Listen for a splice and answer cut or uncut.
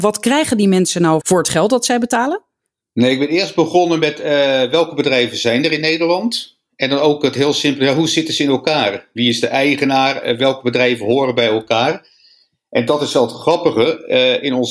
cut